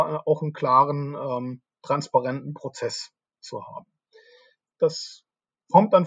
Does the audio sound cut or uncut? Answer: cut